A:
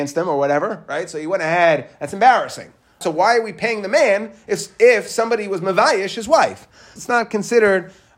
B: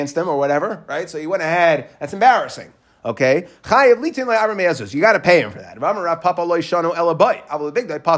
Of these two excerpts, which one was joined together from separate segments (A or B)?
A